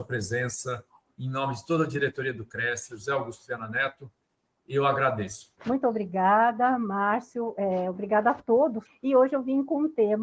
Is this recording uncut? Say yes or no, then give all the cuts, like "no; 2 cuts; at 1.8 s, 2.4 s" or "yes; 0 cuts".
no; 3 cuts; at 2.9 s, 5.6 s, 8.9 s